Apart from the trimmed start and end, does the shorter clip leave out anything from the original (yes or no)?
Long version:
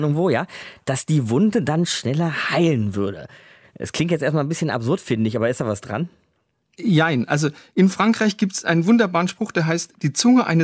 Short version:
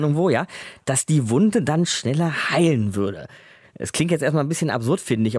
no